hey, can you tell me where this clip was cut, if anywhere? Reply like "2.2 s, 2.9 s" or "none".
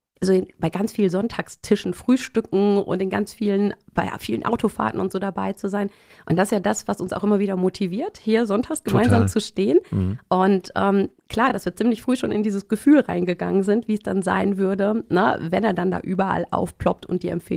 none